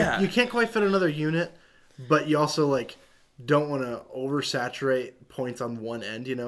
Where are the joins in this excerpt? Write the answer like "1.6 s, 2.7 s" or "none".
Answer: none

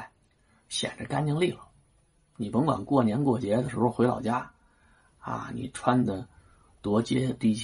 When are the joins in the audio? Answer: none

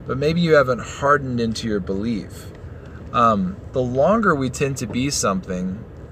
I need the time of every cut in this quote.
none

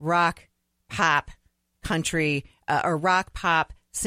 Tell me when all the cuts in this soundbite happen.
none

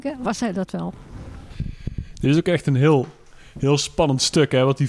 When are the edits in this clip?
none

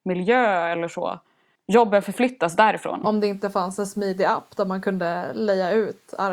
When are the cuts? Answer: 1.5 s, 3.0 s

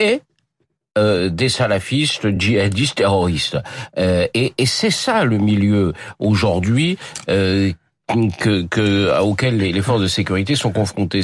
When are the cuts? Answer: none

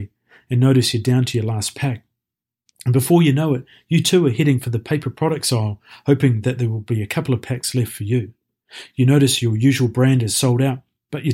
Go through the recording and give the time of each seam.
none

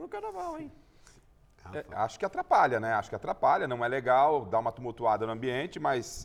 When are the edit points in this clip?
none

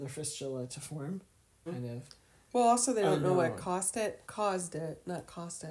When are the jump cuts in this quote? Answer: 1.7 s, 4.2 s

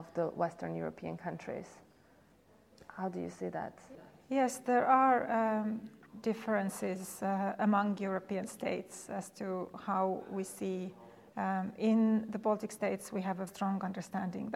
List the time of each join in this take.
11.3 s, 13.5 s

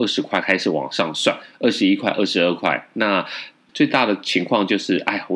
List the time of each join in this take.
3.7 s

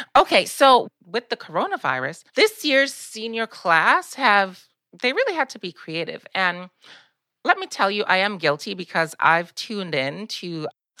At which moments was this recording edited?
2.3 s

